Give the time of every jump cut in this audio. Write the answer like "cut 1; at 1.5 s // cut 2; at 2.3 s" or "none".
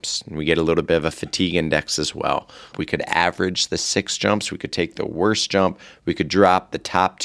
cut 1; at 2.7 s

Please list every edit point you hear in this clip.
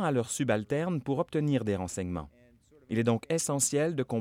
none

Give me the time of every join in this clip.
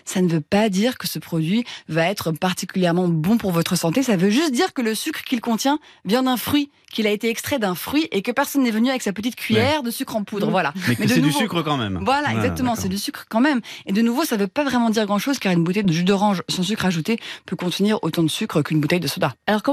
none

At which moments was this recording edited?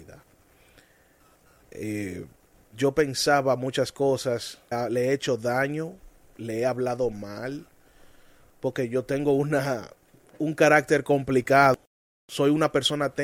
cut 1; at 4.7 s

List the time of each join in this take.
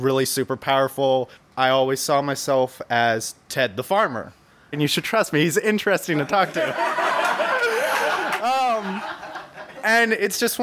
cut 1; at 1.4 s // cut 2; at 4.7 s

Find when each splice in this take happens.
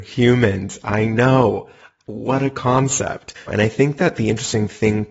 cut 1; at 3.5 s

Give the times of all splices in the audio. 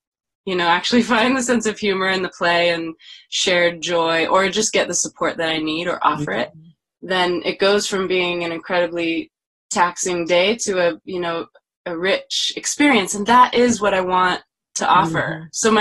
none

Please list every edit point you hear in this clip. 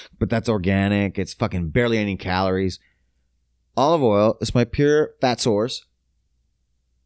none

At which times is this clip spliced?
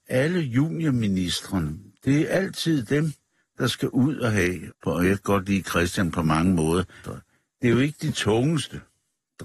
cut 1; at 4.7 s // cut 2; at 7.0 s

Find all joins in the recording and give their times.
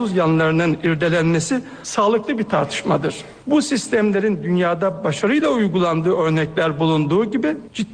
none

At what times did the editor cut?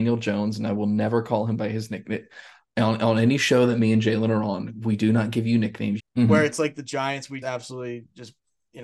cut 1; at 6.0 s // cut 2; at 7.4 s

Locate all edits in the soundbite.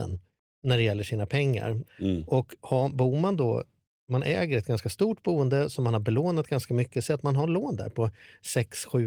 cut 1; at 1.8 s

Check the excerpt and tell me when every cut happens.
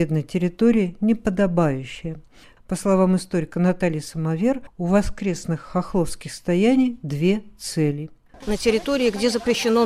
cut 1; at 8.4 s

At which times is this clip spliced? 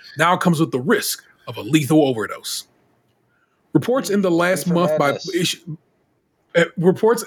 none

